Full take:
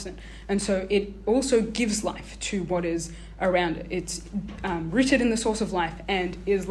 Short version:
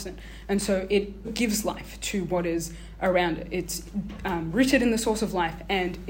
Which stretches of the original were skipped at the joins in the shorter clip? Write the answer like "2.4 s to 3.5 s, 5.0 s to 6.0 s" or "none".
1.2 s to 1.6 s